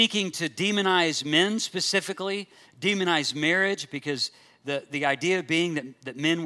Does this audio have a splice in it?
no; 0 cuts

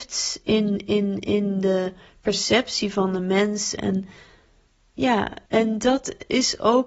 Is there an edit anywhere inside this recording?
yes; 2 cuts; at 3.8 s, 5.5 s

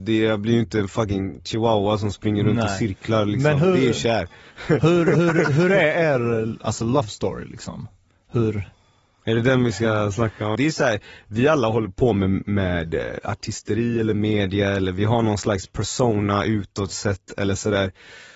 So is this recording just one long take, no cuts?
no; 1 cut; at 10.6 s

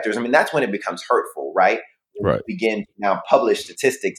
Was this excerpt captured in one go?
yes; 0 cuts

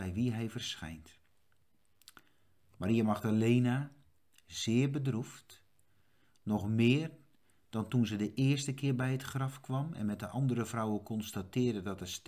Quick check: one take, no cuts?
yes; 0 cuts

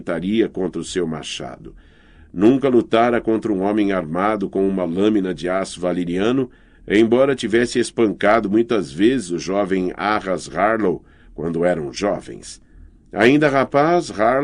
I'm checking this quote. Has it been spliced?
no; 0 cuts

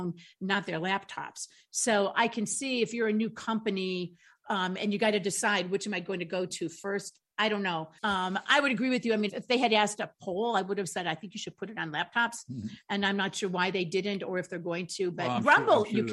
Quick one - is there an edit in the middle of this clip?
yes; 2 cuts; at 8.0 s, 9.3 s

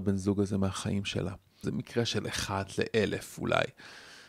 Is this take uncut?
no; 1 cut; at 1.6 s

